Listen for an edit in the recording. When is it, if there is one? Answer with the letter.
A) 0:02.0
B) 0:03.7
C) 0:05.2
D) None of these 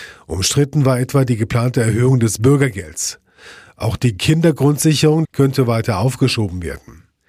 C